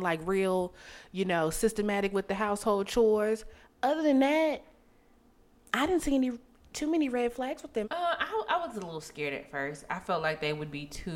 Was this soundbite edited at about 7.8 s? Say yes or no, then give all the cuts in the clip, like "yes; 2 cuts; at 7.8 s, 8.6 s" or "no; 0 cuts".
yes; 1 cut; at 7.8 s